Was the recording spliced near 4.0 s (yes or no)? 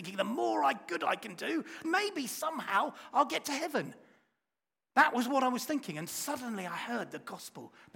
no